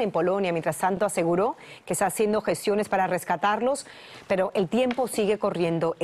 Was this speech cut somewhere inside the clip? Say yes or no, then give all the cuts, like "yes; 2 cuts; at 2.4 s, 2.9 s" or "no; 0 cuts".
no; 0 cuts